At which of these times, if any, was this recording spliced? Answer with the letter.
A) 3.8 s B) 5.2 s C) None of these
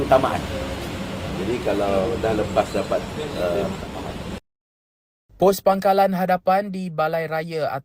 A